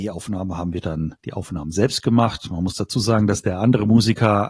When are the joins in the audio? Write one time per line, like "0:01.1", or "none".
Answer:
0:01.2